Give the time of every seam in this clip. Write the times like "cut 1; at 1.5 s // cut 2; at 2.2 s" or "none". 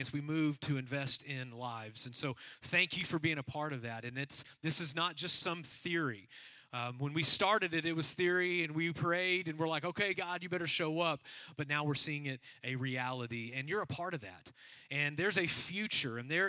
none